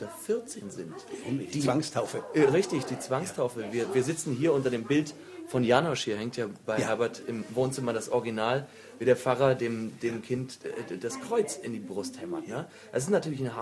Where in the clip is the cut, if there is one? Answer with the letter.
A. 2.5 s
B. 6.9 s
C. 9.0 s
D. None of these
D